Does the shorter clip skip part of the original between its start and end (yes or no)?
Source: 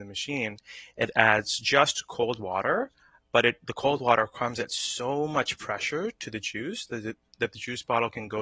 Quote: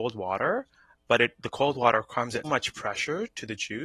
yes